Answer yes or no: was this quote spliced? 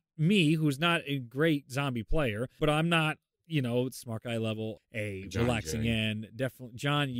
yes